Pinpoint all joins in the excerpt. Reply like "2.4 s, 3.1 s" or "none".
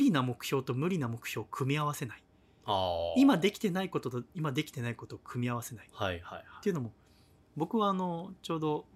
none

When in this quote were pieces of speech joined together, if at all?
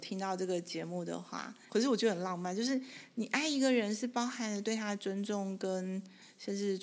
1.7 s

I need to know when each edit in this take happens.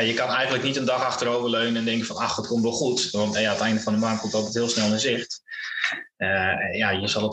3.3 s

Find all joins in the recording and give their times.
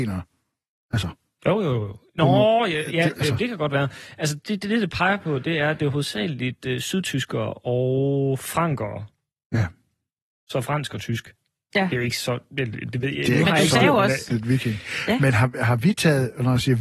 14.3 s

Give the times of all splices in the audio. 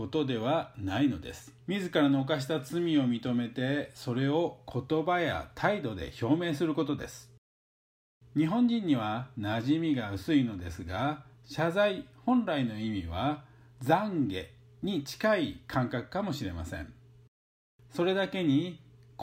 1.6 s

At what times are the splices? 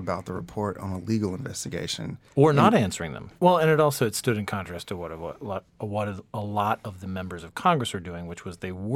3.4 s

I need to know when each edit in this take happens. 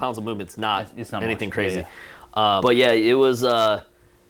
2.6 s

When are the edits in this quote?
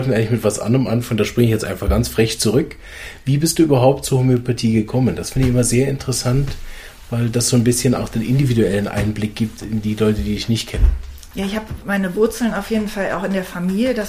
none

